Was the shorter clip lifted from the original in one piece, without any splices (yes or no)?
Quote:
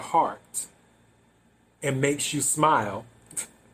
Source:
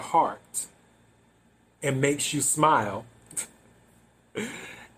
yes